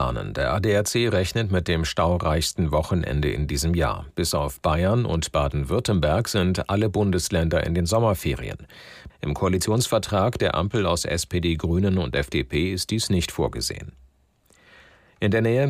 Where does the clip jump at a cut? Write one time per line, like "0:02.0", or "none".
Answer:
0:09.1